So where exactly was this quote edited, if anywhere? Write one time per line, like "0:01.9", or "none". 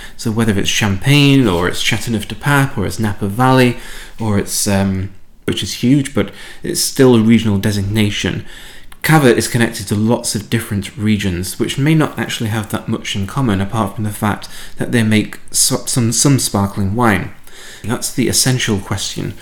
0:05.5
0:17.8

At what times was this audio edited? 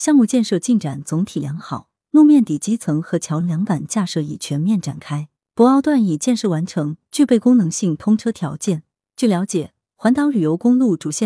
0:03.4

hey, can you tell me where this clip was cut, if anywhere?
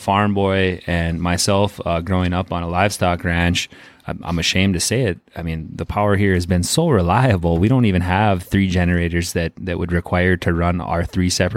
none

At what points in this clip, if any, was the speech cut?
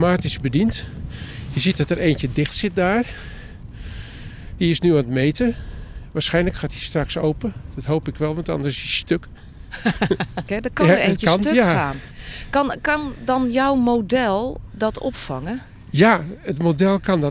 0:10.5

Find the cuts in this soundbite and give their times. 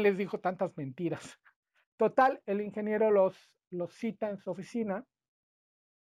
0:01.9

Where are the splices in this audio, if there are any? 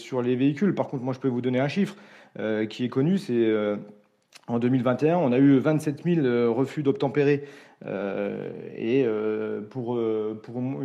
none

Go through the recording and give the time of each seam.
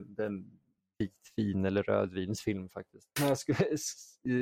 0:03.2

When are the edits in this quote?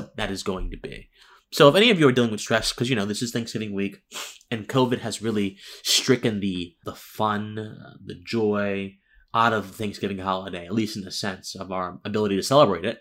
0:06.8

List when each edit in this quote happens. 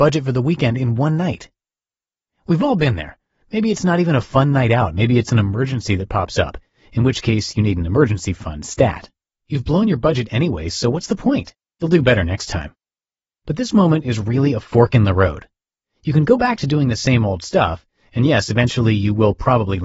0:09.3

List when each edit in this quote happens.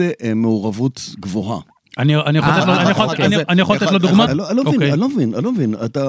0:04.3

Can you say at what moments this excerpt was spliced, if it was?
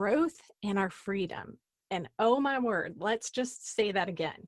none

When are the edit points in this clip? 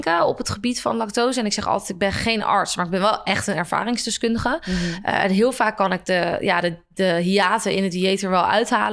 none

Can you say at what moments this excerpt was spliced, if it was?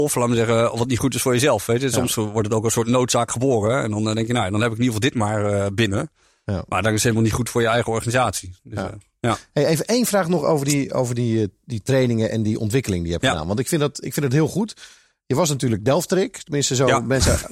none

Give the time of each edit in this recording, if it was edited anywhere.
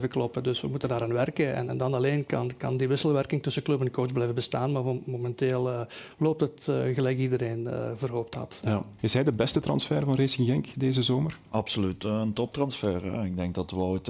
0:09.0

